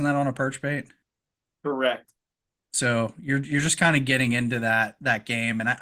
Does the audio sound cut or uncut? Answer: uncut